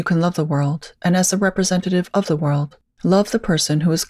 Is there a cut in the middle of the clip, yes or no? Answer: no